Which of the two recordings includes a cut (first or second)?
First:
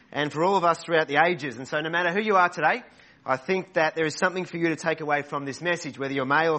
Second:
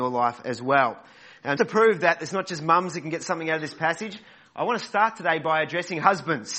second